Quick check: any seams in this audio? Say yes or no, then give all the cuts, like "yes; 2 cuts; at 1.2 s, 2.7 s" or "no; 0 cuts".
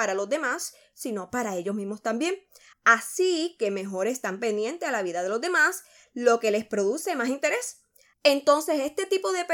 yes; 2 cuts; at 2.7 s, 8.1 s